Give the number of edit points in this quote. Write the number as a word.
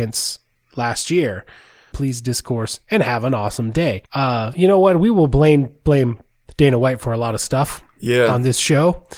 two